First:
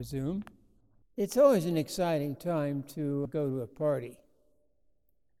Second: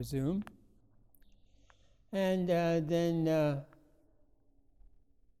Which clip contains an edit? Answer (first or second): first